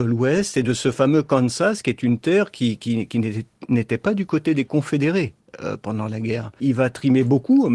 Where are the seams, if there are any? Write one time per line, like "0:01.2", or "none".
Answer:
0:06.6